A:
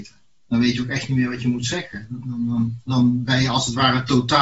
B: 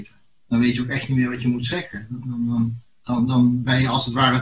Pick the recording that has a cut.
A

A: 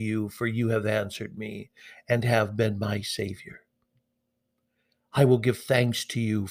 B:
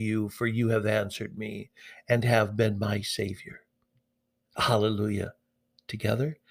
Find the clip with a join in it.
B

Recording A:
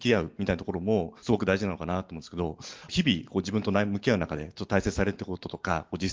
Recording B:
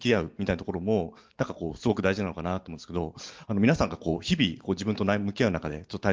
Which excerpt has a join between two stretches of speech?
A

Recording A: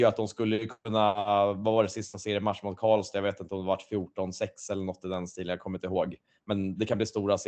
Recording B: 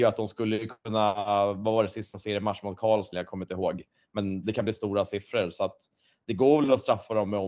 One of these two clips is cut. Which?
B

